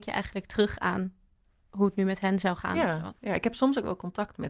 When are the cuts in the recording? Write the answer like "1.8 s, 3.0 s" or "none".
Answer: none